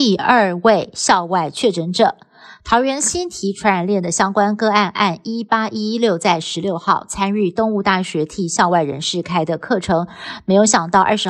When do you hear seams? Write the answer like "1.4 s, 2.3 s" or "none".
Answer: none